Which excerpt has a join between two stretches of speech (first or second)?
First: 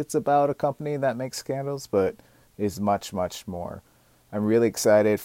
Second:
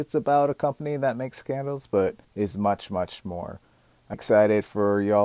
second